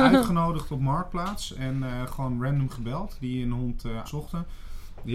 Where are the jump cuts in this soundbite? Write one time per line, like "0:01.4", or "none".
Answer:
0:04.1